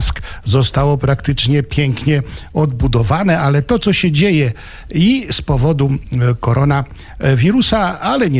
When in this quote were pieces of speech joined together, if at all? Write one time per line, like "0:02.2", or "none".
none